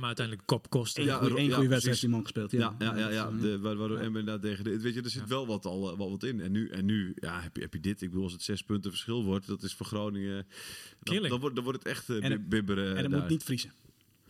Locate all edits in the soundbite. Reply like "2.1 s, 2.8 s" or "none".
none